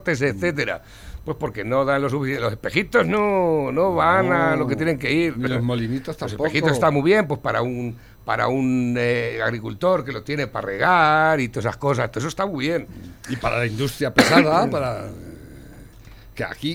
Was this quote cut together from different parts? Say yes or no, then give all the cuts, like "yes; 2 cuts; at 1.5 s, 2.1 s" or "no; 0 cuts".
yes; 1 cut; at 13.2 s